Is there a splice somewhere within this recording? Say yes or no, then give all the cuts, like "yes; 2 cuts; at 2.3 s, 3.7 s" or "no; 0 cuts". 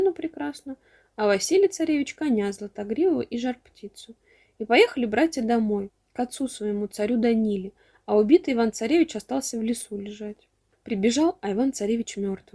yes; 1 cut; at 10.7 s